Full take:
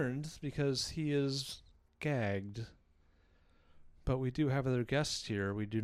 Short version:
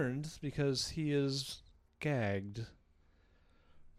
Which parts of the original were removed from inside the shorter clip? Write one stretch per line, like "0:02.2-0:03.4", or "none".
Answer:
none